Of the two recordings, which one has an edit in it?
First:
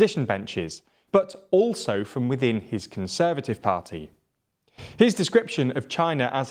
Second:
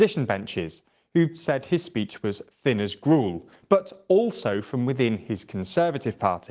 first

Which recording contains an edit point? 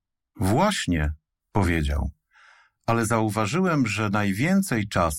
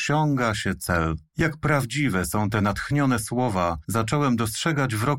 second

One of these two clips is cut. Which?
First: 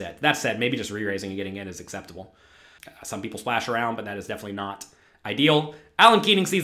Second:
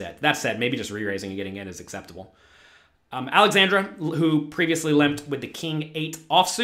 first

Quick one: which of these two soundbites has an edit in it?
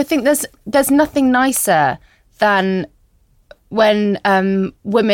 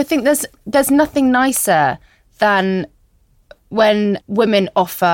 second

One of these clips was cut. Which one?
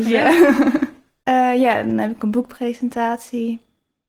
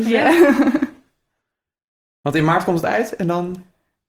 first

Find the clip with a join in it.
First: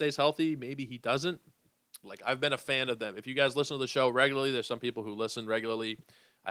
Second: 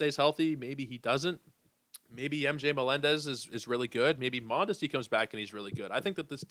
first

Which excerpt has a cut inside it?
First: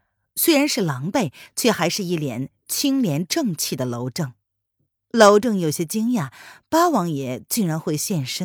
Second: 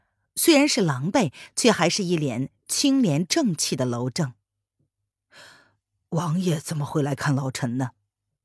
first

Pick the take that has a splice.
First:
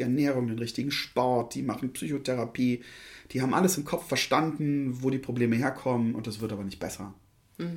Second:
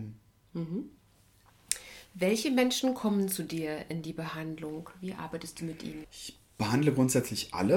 second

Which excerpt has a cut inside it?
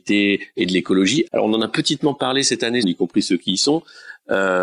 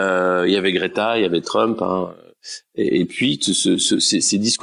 first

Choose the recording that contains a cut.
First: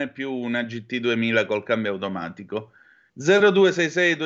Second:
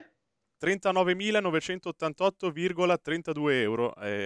first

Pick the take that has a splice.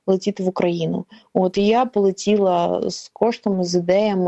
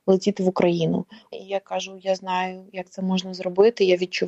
second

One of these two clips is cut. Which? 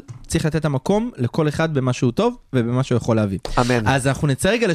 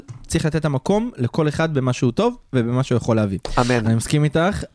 second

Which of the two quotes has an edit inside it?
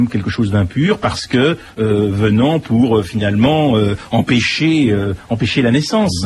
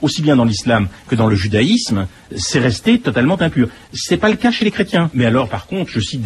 second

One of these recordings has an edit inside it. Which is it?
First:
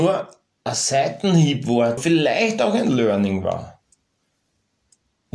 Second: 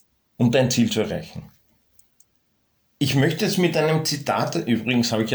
first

